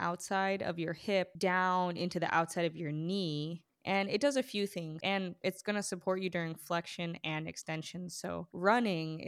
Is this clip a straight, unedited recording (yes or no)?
no